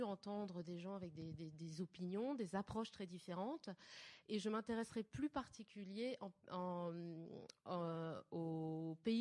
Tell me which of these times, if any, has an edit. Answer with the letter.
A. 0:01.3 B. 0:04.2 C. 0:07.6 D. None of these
B